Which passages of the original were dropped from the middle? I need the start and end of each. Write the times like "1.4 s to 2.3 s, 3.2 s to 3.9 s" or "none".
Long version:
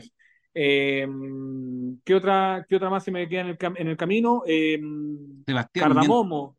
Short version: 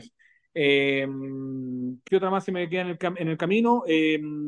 2.1 s to 2.7 s